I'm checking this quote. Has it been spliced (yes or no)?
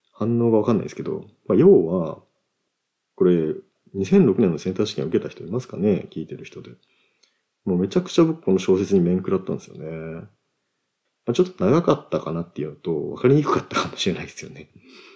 yes